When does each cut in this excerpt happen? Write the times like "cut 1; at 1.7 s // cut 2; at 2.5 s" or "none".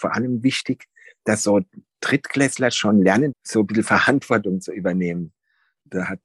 cut 1; at 3.3 s

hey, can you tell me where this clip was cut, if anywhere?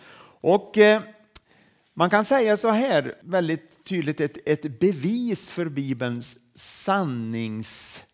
cut 1; at 3.2 s

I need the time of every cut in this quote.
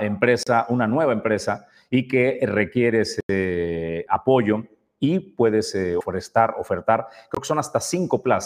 none

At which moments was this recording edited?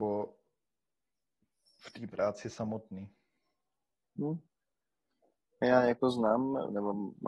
none

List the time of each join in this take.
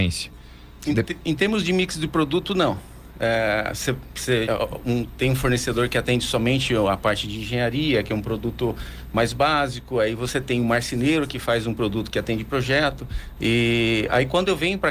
cut 1; at 4.5 s // cut 2; at 13.4 s

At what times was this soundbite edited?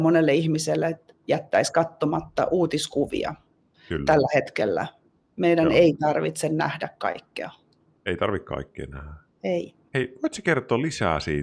none

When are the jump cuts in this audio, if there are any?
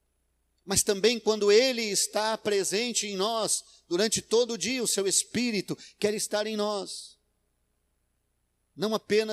none

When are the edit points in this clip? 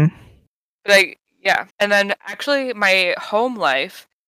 cut 1; at 1.7 s

